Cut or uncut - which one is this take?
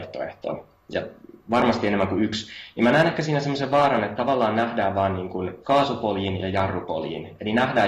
cut